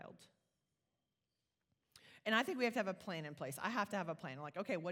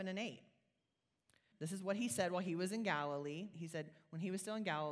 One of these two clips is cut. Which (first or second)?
second